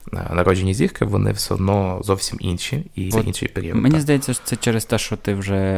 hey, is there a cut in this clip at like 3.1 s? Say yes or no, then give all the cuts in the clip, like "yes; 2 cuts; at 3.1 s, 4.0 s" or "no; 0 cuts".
yes; 1 cut; at 3.1 s